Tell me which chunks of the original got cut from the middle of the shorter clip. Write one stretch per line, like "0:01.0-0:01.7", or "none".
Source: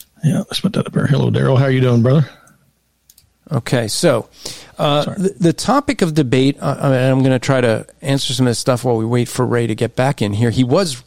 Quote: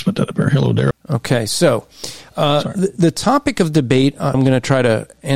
0:01.5-0:03.3
0:06.8-0:07.1

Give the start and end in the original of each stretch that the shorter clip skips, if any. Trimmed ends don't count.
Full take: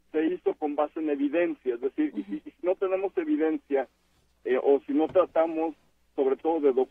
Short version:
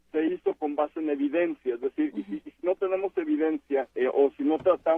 0:03.9-0:04.4

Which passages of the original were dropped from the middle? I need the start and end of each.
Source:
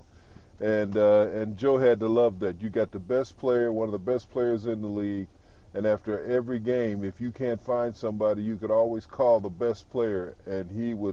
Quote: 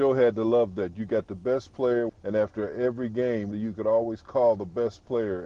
0:03.7-0:05.6
0:07.0-0:08.4

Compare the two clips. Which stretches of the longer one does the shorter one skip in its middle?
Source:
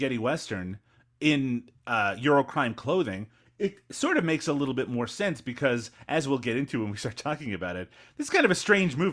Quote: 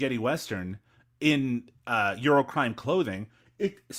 none

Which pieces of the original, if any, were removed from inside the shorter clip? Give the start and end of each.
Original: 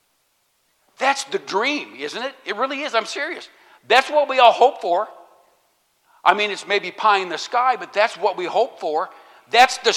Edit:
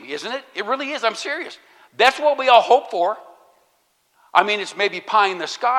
none

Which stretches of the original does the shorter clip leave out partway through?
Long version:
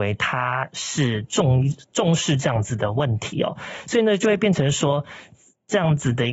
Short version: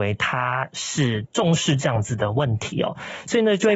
0:01.3-0:01.9

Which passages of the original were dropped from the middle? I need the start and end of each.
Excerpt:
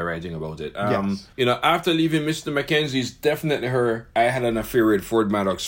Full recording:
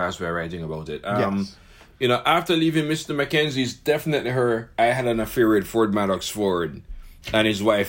0:01.6-0:01.9

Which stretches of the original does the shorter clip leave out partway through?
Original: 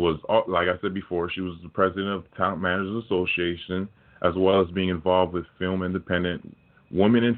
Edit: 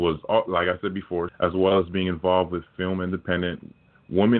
0:01.3-0:04.1

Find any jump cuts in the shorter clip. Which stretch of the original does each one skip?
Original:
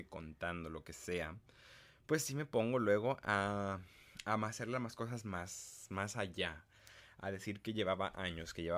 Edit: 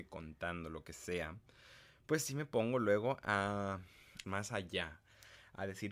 0:04.2-0:05.9

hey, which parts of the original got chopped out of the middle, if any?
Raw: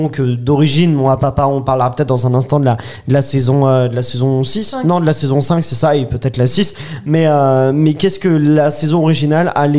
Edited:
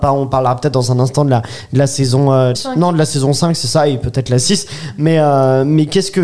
0:03.9-0:04.6

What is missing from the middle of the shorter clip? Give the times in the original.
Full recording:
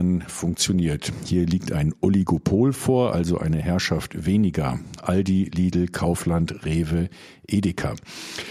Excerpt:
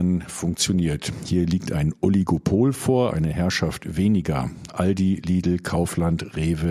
0:03.1-0:03.4

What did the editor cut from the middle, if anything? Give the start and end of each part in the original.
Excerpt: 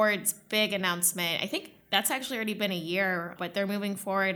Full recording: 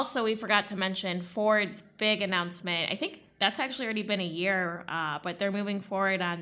0:04.8-0:05.2

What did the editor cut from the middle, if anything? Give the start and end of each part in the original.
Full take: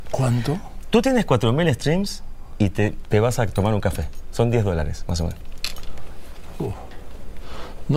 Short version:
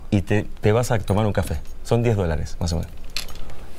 none

